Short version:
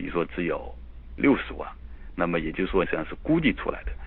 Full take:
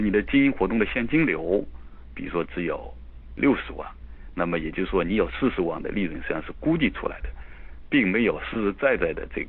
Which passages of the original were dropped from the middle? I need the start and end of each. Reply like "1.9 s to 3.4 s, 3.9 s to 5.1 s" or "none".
5.0 s to 6.2 s